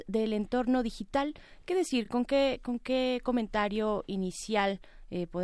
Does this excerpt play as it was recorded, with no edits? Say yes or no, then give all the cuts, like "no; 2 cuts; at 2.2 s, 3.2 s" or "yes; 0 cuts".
yes; 0 cuts